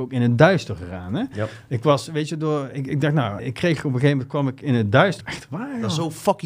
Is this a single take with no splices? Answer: no; 2 cuts; at 3.4 s, 5.2 s

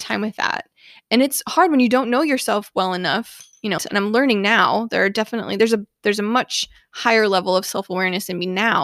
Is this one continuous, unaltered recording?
no; 1 cut; at 3.8 s

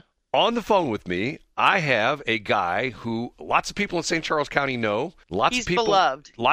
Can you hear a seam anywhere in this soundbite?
yes; 1 cut; at 5.2 s

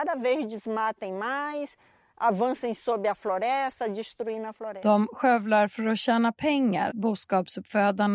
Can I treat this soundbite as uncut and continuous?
no; 1 cut; at 6.9 s

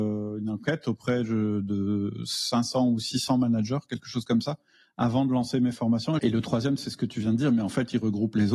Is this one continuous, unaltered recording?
no; 1 cut; at 6.2 s

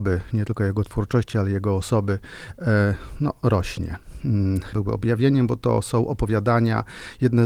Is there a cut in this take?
yes; 1 cut; at 4.7 s

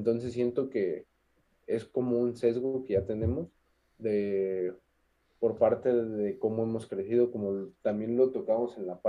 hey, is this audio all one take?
yes; 0 cuts

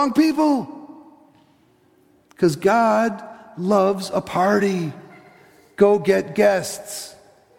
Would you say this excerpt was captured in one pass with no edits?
yes; 0 cuts

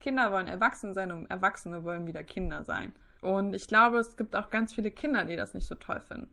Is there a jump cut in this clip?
yes; 1 cut; at 3.2 s

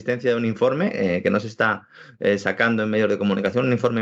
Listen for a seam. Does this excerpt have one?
no; 0 cuts

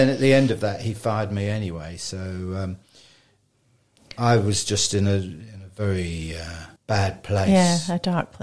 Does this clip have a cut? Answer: yes; 1 cut; at 6.8 s

